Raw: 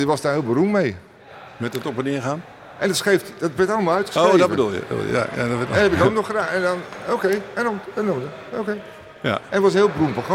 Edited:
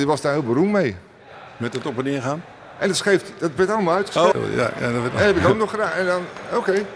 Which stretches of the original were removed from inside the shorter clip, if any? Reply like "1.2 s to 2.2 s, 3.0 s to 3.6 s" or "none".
4.3 s to 4.9 s